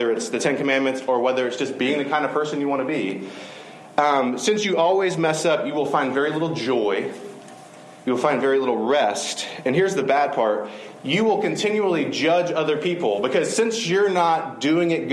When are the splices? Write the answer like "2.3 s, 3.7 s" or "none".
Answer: none